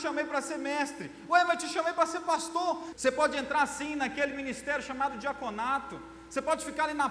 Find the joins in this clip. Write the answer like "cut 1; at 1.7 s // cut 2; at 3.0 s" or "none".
cut 1; at 2.9 s